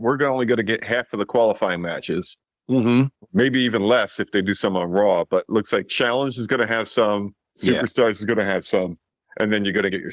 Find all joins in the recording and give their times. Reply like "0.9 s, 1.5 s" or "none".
none